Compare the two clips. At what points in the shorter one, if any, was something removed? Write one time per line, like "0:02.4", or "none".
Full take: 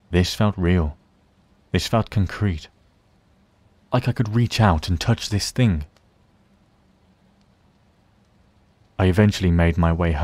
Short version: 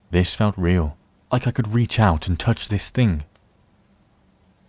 0:01.3